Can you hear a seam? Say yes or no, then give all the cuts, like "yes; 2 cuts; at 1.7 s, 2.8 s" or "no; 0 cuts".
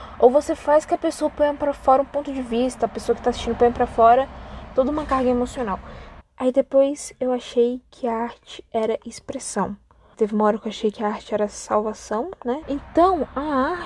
yes; 3 cuts; at 6.2 s, 10.1 s, 12.6 s